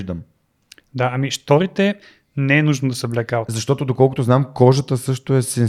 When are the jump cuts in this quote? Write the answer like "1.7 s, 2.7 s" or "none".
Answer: none